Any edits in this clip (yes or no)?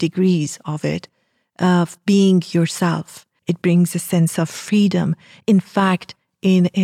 yes